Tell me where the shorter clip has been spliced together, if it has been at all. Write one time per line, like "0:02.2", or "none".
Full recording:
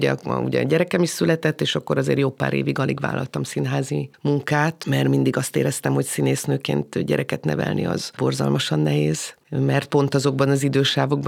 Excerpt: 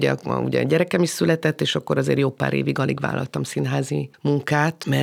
none